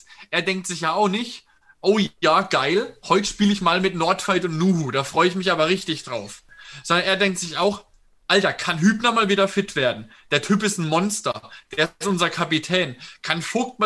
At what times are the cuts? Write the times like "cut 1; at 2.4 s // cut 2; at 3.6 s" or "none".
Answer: none

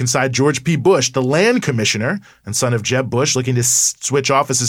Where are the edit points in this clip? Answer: none

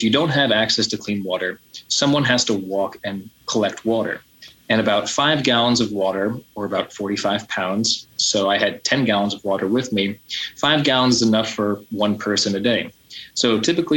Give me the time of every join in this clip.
none

